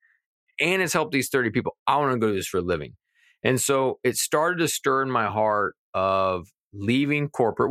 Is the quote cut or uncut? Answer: uncut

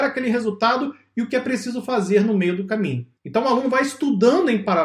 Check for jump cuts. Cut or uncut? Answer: cut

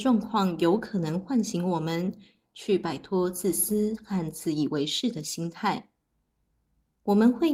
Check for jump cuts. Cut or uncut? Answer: uncut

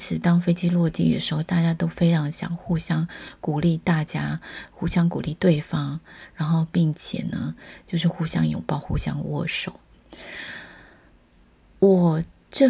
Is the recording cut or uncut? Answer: uncut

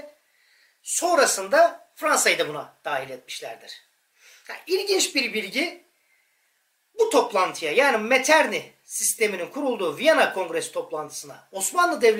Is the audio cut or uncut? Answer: uncut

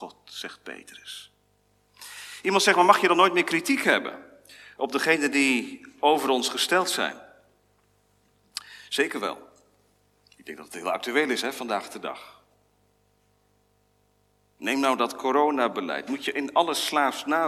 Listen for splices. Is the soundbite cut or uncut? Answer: uncut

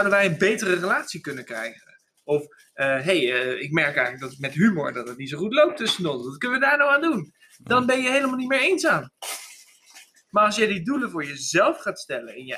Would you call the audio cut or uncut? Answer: uncut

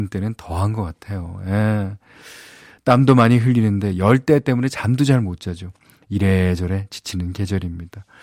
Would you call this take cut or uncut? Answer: uncut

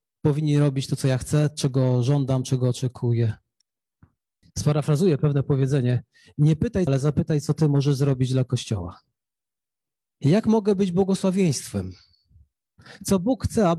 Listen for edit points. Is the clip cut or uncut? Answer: cut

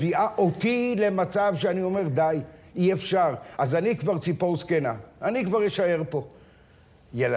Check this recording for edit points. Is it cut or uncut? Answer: uncut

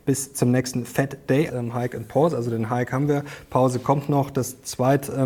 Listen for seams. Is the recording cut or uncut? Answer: cut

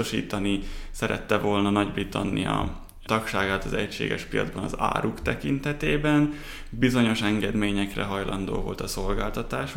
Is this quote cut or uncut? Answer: cut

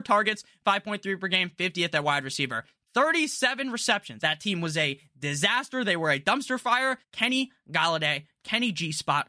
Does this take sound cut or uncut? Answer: cut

